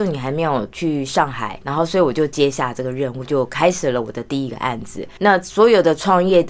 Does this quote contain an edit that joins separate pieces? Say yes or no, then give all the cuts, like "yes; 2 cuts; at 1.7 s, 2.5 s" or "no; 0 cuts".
yes; 2 cuts; at 1.6 s, 5.2 s